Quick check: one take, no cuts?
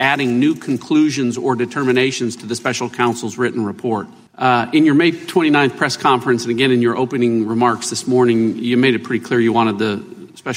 no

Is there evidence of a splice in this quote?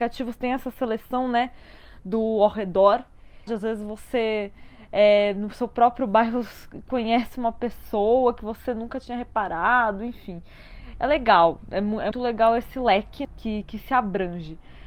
yes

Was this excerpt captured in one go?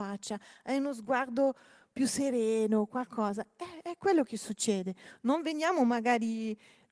yes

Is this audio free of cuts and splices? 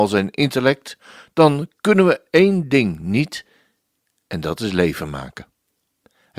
yes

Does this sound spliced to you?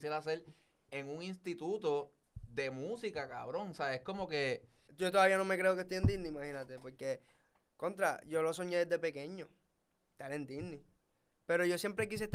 yes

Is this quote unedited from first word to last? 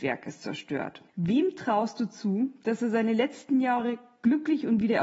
no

